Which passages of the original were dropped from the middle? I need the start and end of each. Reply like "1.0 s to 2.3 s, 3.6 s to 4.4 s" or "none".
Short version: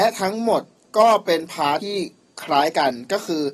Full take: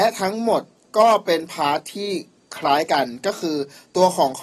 1.8 s to 1.9 s